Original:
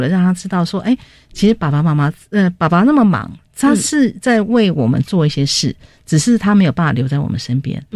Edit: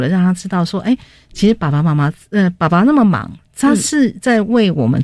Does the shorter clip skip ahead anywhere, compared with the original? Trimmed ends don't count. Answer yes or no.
no